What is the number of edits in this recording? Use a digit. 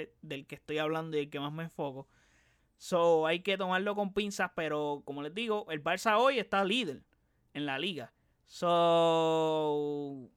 1